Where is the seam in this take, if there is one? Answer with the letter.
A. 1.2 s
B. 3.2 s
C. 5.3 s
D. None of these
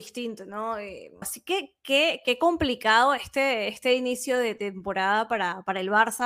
A